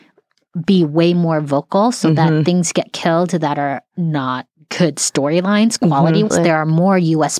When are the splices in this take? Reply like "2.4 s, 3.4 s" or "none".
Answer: 6.3 s